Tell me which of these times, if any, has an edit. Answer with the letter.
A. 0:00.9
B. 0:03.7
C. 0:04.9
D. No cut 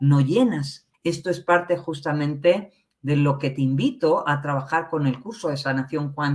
A